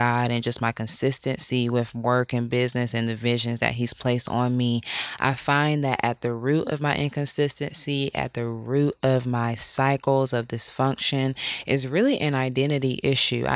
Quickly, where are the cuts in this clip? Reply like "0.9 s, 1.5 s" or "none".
none